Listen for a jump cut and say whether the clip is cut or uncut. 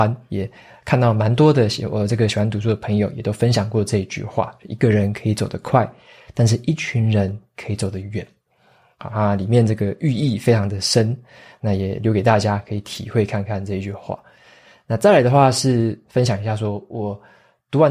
uncut